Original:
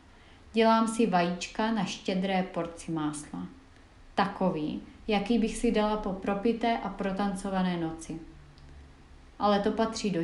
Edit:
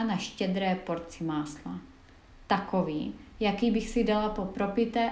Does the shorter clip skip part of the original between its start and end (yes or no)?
no